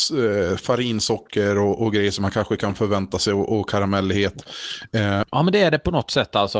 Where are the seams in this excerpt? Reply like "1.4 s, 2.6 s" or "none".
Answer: 5.2 s